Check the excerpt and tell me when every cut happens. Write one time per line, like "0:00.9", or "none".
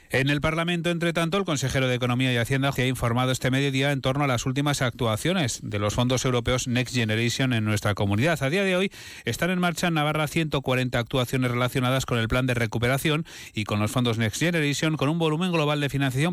0:02.7